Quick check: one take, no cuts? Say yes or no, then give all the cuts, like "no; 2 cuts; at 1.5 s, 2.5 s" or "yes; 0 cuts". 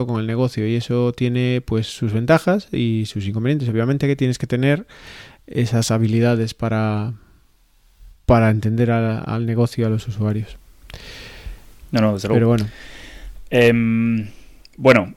yes; 0 cuts